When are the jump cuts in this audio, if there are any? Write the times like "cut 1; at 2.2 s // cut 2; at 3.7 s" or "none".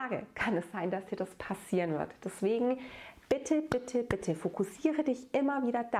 none